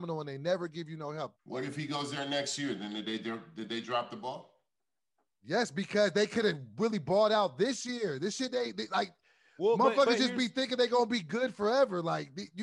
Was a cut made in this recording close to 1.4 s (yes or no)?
yes